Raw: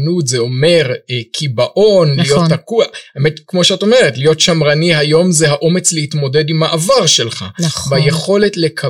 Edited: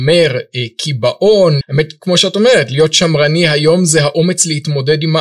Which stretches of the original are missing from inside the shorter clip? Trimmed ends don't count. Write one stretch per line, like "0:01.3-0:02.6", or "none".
0:02.2-0:03.1